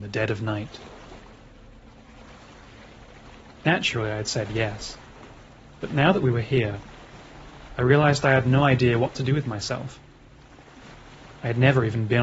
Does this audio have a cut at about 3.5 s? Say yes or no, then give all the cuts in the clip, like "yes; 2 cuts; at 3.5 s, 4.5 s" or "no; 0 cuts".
no; 1 cut; at 5.8 s